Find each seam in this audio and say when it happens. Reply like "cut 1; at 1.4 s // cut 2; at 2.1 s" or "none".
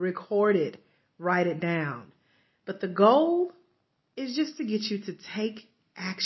none